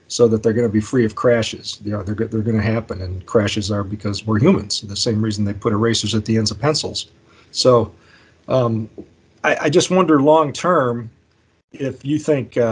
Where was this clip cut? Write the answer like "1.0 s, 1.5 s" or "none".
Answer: none